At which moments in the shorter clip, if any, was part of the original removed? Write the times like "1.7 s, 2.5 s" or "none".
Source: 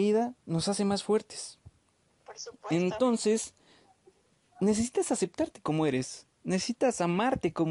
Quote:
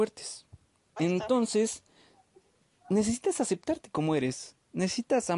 1.0 s